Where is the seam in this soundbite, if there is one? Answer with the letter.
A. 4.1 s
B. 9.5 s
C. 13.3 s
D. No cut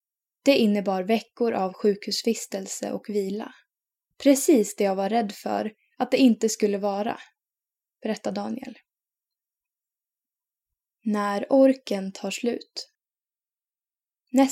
A